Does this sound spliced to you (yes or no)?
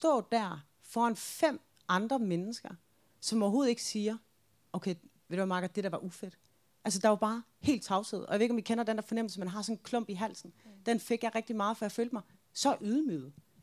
no